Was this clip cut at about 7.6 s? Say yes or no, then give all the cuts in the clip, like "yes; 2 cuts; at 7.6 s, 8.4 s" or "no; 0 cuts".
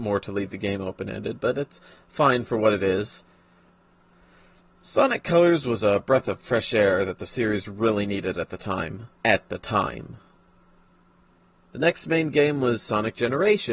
no; 2 cuts; at 9.1 s, 11.6 s